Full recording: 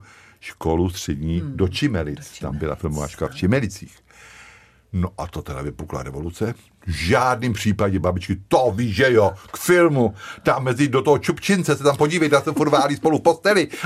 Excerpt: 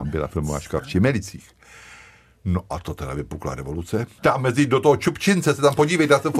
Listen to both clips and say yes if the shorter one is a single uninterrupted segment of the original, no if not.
no